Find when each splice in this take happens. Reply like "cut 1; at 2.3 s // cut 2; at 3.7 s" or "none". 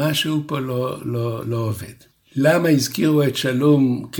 cut 1; at 1.4 s